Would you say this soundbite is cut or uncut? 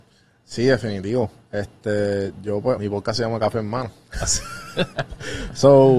cut